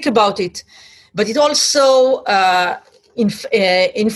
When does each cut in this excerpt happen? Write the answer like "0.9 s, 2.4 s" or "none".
none